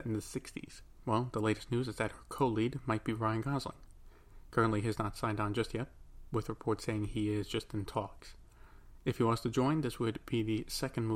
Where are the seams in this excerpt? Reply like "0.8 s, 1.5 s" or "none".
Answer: none